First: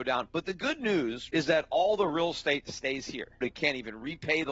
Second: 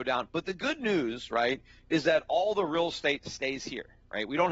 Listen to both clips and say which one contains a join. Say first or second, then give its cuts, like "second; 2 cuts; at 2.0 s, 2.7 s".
first; 2 cuts; at 1.3 s, 3.4 s